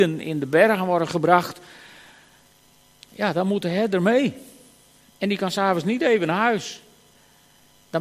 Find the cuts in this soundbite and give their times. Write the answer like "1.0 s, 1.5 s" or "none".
none